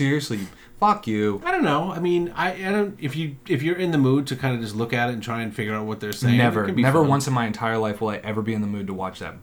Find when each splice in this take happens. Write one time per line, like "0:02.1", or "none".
none